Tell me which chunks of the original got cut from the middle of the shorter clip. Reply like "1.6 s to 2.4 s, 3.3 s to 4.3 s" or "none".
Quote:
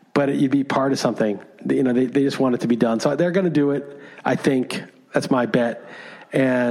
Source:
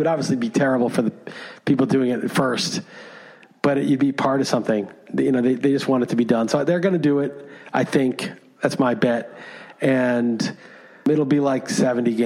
none